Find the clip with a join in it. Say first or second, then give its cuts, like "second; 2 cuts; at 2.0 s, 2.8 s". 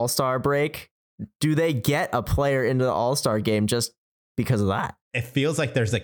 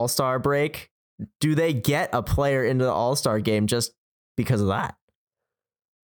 first; 1 cut; at 5.0 s